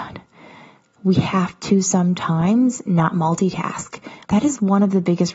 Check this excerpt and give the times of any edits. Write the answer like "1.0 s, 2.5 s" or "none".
4.2 s